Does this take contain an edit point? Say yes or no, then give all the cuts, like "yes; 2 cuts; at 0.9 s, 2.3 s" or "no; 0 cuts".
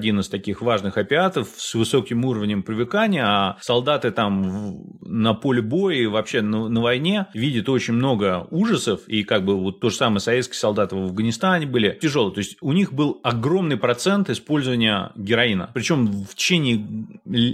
yes; 1 cut; at 12.0 s